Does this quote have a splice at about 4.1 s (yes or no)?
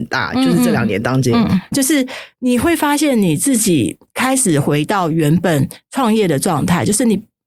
yes